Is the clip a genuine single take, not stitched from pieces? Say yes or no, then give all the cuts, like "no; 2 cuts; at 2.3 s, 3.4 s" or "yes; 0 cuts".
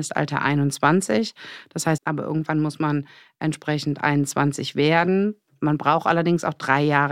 no; 1 cut; at 2.0 s